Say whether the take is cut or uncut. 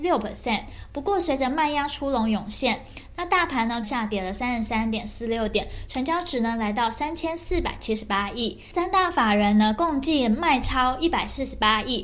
cut